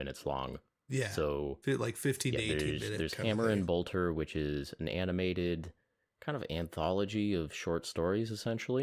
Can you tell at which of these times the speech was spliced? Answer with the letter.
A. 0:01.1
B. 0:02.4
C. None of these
C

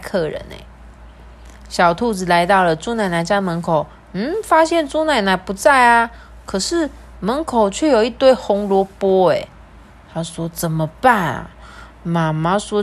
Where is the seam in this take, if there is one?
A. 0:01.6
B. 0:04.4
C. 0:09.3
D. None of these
D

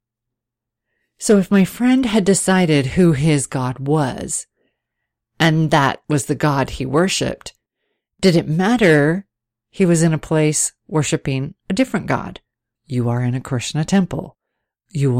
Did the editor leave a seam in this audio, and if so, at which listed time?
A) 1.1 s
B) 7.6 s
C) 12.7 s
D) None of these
C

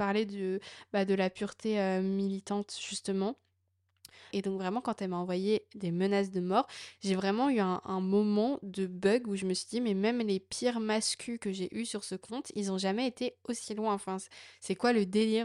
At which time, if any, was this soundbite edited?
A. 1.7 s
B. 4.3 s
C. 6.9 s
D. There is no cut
B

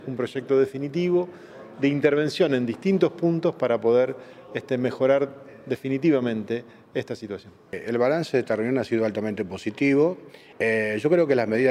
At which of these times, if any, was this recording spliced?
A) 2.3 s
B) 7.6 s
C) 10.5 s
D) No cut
C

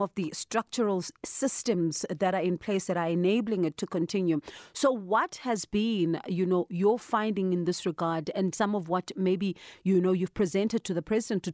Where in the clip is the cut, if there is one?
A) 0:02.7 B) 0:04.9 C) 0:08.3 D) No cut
C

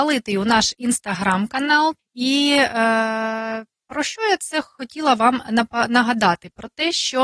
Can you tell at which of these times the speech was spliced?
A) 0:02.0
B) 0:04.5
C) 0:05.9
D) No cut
A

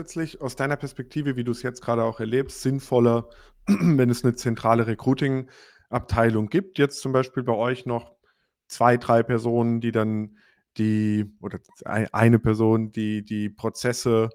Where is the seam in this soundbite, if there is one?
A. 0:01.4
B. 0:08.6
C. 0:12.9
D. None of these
D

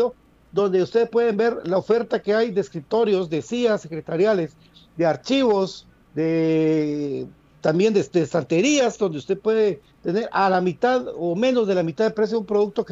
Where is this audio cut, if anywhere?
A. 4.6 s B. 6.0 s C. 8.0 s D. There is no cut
D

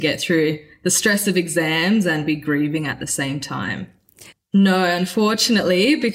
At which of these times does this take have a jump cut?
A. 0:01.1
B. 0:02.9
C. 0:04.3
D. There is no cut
C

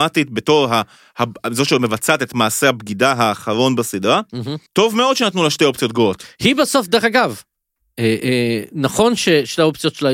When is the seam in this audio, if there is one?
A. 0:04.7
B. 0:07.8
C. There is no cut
A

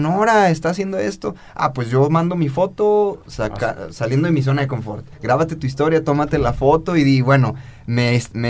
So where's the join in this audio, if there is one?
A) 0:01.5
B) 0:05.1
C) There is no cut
B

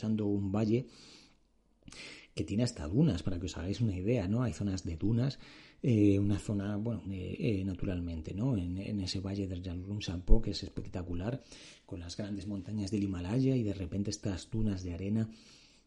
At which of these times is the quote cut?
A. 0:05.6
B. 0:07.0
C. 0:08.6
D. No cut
B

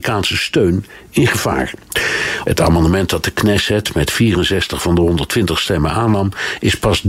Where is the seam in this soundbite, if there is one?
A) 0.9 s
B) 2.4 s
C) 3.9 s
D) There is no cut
B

